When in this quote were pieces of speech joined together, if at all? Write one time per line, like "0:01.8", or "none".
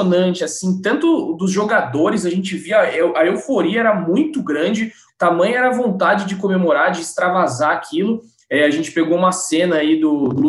0:05.1